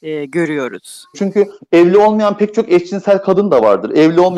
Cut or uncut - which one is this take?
cut